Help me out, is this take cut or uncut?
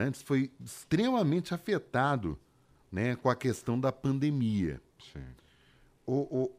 uncut